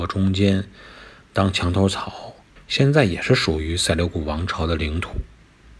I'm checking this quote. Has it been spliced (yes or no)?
yes